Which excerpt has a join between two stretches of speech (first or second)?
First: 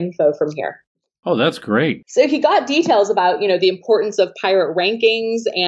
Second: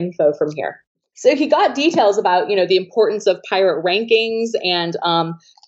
second